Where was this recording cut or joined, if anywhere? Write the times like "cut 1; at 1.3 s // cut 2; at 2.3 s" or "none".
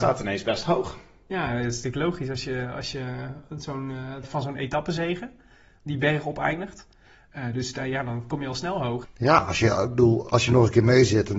cut 1; at 4.2 s // cut 2; at 9.0 s